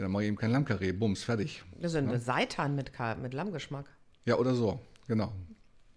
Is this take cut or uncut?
uncut